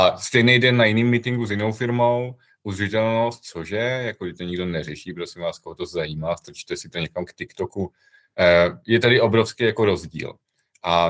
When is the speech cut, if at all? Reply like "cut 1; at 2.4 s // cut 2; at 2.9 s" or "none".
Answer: none